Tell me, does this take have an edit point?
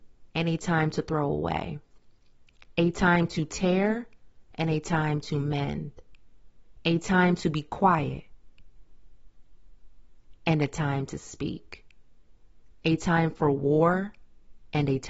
yes; 1 cut; at 12.8 s

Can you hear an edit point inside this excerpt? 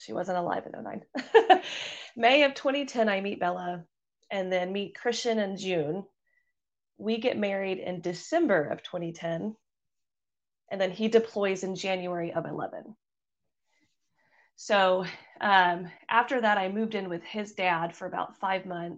no; 0 cuts

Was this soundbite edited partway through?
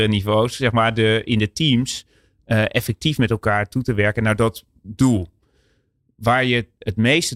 no; 0 cuts

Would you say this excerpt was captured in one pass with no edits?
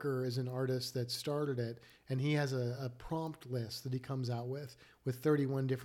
yes; 0 cuts

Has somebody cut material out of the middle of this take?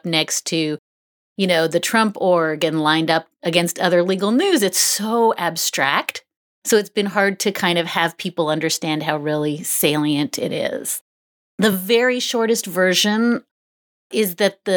no; 0 cuts

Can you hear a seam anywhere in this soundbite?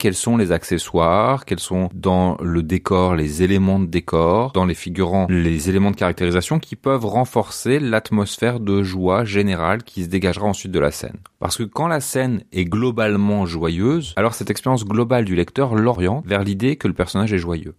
no; 0 cuts

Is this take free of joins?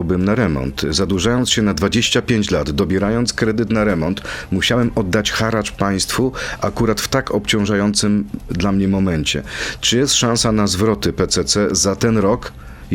yes; 0 cuts

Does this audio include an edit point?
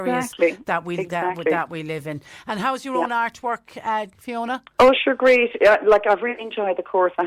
yes; 1 cut; at 4.1 s

